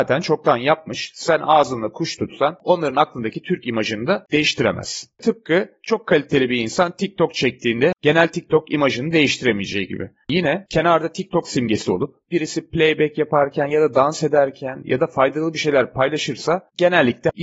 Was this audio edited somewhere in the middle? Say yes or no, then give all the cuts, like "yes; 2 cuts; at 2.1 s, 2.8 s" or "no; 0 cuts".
yes; 1 cut; at 10.2 s